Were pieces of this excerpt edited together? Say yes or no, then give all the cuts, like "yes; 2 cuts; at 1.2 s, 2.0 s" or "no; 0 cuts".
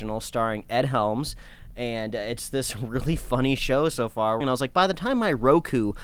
yes; 1 cut; at 4.4 s